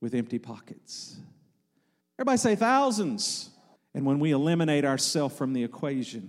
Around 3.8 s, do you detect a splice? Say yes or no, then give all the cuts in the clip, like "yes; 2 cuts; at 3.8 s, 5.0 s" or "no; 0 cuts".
yes; 2 cuts; at 2.0 s, 3.8 s